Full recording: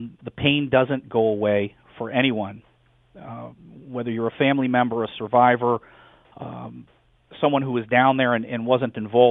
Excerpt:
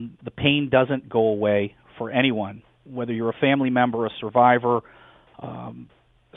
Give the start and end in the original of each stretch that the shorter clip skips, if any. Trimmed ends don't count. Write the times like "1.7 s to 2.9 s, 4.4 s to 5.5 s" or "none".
2.9 s to 3.8 s